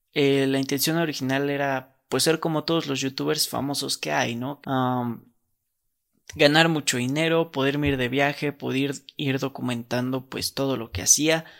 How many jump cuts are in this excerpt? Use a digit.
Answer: 1